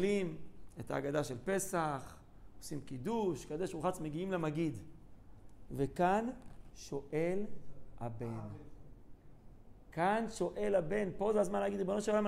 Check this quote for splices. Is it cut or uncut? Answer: cut